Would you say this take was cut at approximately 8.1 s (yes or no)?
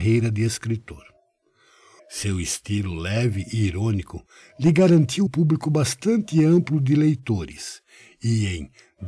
no